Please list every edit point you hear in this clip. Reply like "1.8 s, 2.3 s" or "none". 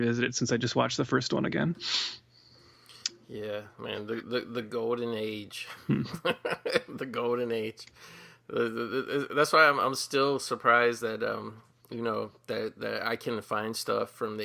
none